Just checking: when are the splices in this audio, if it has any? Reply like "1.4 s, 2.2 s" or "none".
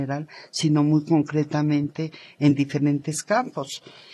none

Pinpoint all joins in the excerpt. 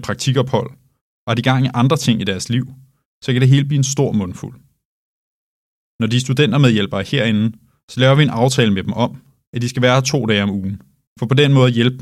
11.1 s

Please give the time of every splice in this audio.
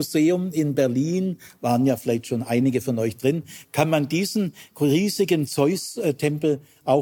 none

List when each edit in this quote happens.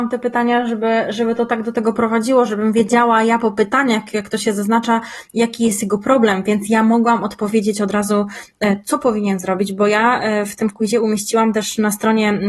none

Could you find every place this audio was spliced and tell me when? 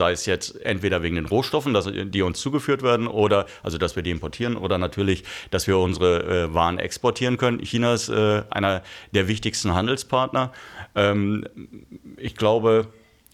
none

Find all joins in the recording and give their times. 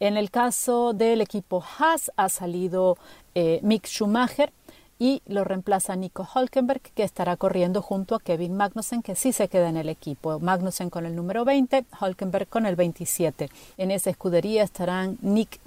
13.7 s

